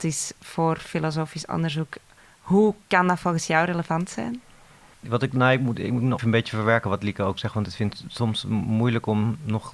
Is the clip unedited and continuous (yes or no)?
no